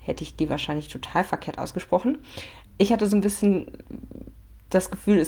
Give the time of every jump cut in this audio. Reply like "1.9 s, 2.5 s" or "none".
2.6 s

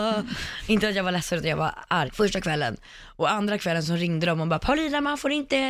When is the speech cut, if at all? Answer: 2.1 s

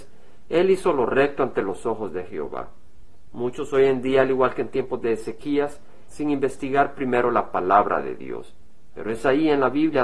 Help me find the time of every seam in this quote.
3.3 s, 6.1 s

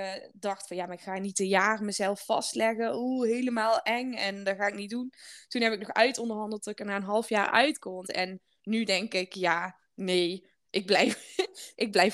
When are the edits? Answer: 8.0 s

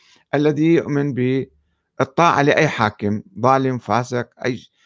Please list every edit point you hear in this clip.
none

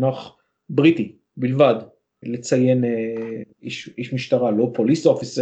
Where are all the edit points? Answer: 2.2 s, 3.5 s

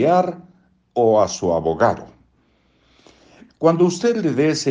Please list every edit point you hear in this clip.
3.5 s

